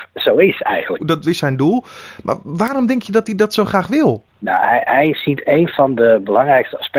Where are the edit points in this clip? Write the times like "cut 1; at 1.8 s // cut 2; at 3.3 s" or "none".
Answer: cut 1; at 1.0 s